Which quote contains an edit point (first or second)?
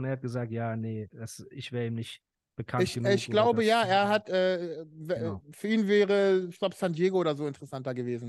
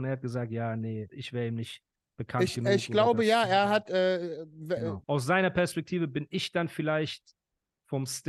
second